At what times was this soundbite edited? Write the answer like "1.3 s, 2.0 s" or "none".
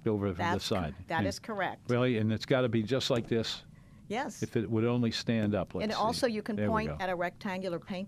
none